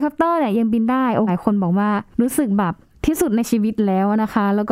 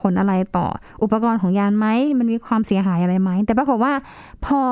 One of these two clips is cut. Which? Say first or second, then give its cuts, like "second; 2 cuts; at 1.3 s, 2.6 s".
first; 1 cut; at 1.3 s